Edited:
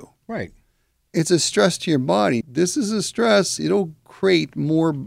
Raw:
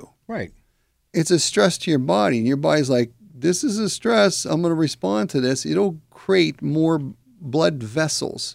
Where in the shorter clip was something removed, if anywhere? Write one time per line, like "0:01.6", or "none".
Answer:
0:02.4
0:03.6

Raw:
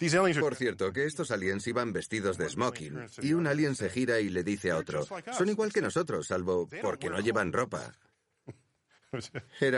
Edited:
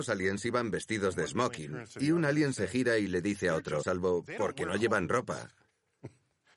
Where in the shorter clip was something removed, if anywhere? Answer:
0:03.8

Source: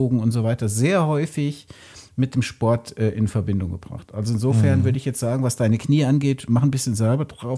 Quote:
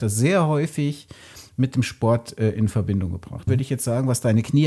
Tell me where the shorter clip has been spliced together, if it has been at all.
0:03.5

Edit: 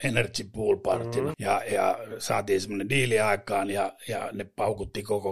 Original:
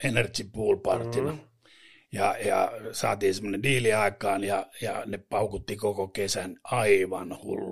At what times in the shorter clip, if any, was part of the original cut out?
0:01.3

